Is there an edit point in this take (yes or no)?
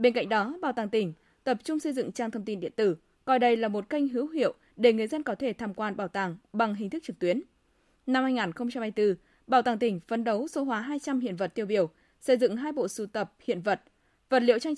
no